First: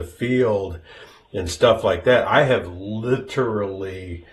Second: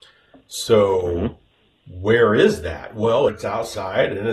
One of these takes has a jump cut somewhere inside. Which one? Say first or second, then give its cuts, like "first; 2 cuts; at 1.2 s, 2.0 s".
second; 1 cut; at 3.3 s